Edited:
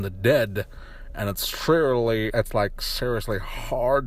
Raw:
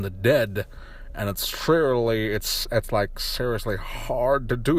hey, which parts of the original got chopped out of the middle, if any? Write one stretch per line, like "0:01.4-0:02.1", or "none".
0:02.3-0:02.7